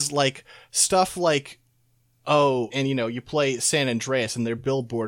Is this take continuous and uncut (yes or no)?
no